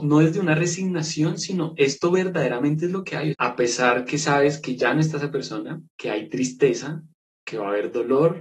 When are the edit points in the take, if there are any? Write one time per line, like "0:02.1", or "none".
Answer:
0:03.3
0:05.9